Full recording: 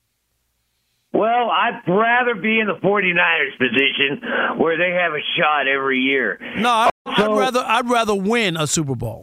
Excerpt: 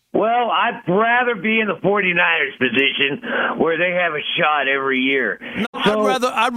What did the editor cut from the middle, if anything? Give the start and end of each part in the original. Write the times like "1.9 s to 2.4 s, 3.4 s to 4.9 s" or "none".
6.6 s to 6.9 s